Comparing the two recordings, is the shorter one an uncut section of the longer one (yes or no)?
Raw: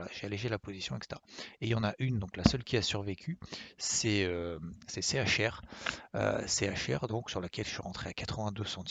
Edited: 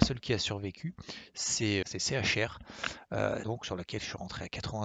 no